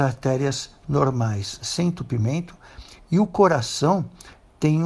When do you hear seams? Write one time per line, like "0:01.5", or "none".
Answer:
none